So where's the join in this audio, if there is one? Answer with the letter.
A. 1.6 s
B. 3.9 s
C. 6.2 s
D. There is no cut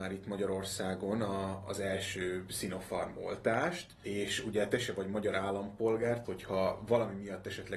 C